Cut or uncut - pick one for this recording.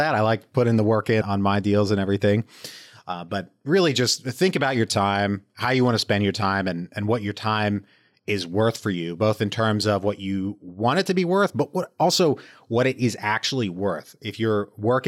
cut